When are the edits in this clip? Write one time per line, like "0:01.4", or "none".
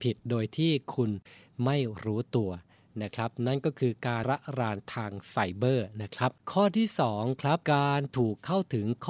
0:04.2
0:06.4
0:07.6